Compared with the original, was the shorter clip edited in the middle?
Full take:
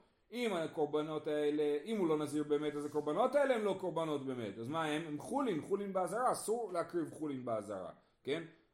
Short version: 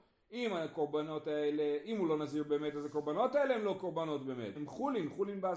yes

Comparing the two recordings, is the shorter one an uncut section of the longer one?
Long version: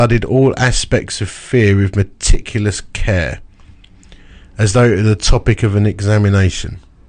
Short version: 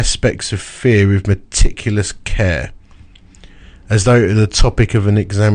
yes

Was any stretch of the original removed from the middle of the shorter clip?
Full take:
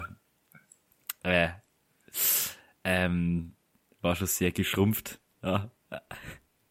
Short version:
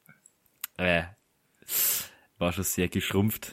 yes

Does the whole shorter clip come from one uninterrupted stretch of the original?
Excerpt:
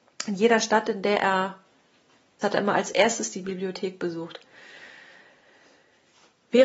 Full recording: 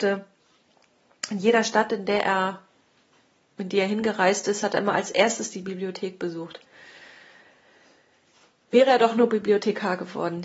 no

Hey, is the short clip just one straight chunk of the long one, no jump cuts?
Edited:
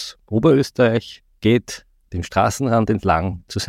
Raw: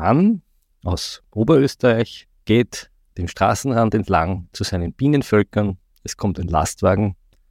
yes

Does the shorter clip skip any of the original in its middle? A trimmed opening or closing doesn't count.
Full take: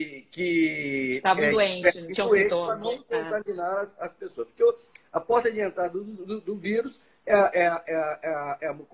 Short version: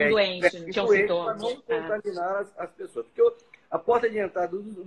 no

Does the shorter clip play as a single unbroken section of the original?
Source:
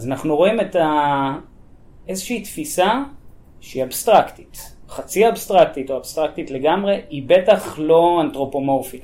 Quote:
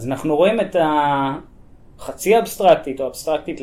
no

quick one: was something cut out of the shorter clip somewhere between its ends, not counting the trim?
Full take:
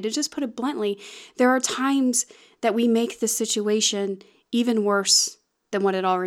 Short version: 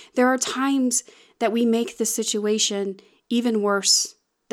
no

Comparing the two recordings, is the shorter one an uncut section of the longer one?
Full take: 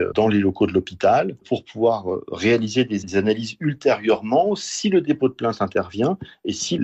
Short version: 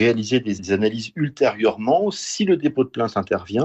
yes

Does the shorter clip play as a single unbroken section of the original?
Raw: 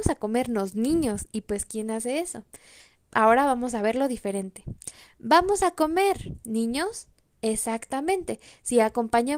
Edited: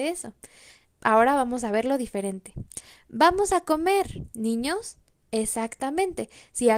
yes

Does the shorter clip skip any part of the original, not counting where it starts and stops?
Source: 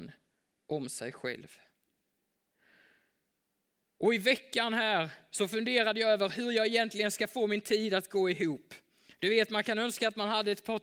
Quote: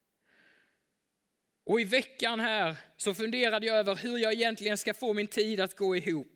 no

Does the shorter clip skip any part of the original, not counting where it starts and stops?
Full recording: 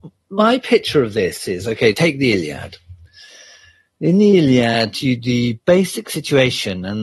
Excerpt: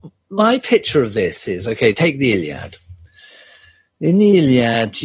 no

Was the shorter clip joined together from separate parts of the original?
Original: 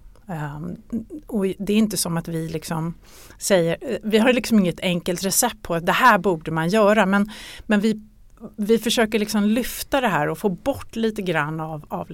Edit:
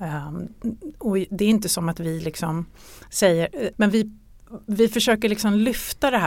yes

